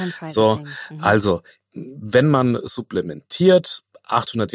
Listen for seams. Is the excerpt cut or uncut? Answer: uncut